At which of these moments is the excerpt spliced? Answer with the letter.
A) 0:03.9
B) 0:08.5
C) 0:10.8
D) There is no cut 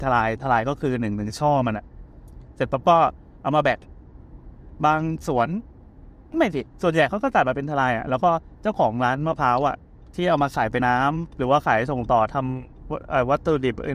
C